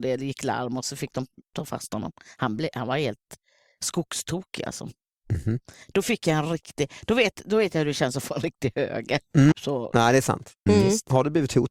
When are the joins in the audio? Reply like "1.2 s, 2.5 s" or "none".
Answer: 9.5 s, 10.7 s